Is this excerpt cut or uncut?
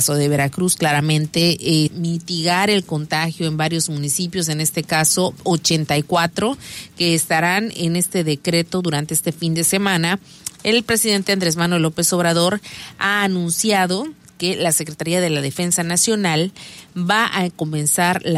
cut